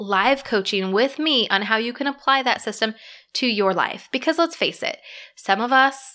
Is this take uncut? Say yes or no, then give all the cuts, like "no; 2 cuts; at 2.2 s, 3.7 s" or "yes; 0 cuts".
yes; 0 cuts